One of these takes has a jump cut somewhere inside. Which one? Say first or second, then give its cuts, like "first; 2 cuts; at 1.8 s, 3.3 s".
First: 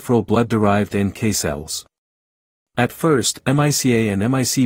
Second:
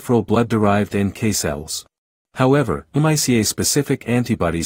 second; 1 cut; at 2.2 s